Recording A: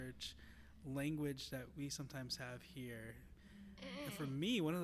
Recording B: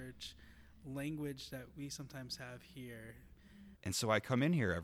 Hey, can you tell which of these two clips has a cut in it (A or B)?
B